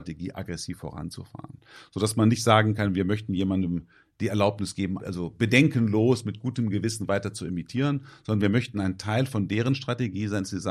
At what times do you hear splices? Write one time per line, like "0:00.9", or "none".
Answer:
0:05.0